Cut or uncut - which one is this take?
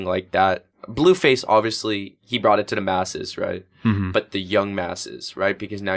uncut